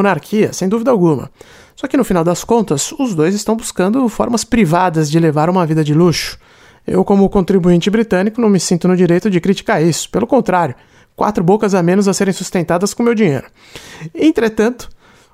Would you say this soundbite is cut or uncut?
uncut